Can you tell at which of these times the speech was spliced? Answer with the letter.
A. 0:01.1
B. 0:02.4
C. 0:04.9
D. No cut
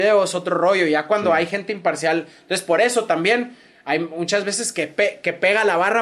D